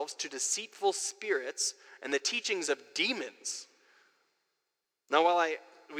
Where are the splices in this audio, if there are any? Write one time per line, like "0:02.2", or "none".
none